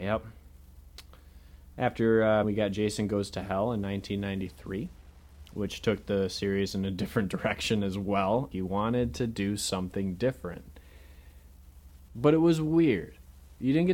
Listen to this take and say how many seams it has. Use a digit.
3